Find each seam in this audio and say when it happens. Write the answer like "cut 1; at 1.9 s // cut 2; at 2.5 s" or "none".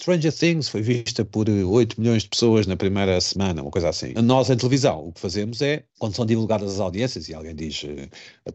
cut 1; at 4.1 s // cut 2; at 5.9 s